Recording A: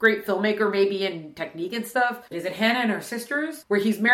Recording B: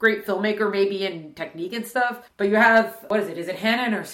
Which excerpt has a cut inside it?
A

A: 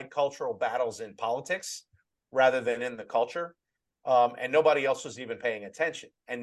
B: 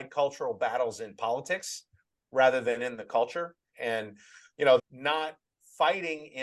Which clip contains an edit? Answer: B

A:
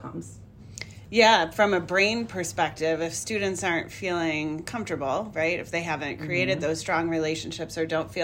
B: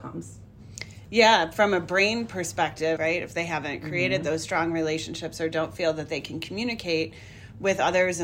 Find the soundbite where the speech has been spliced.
B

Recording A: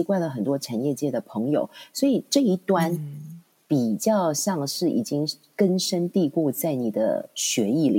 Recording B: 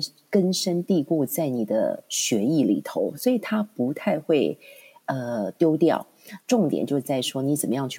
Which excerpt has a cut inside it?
B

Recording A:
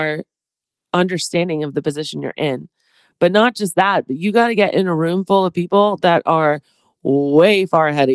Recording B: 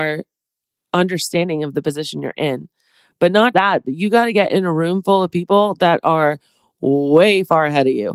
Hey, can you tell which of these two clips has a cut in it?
B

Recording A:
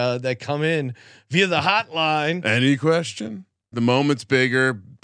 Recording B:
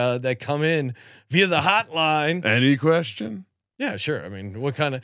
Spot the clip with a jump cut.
A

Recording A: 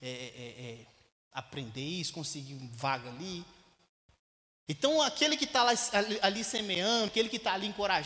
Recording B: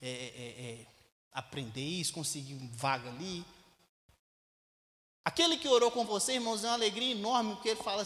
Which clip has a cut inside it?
A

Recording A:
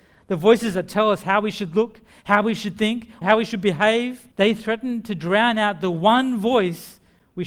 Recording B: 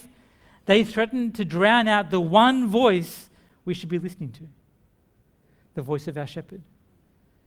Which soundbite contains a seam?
A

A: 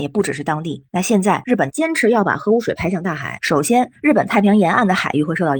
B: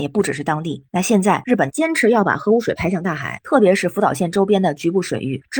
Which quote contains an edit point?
B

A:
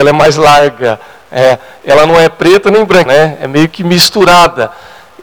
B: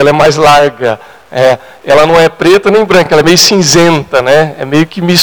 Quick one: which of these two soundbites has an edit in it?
A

